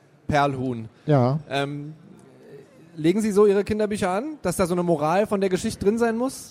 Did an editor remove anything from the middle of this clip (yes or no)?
no